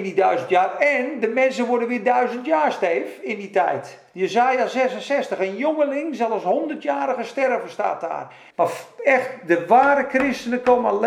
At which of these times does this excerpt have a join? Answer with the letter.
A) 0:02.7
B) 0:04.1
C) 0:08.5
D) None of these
C